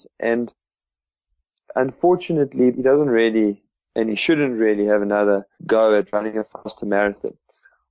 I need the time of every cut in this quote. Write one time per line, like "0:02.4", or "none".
0:02.7
0:05.5